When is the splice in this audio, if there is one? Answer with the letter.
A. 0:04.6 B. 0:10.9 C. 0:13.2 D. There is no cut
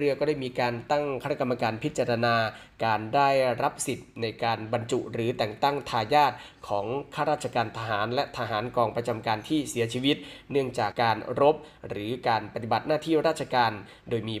B